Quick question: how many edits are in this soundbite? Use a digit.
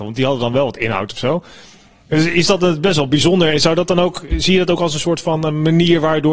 0